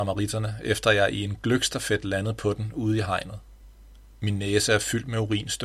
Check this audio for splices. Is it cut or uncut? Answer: uncut